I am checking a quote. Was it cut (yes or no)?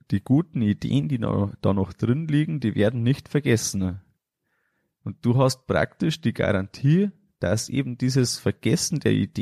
no